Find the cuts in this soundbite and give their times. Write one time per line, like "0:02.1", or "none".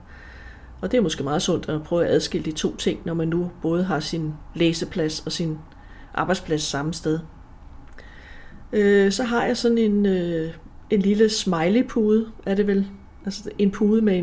none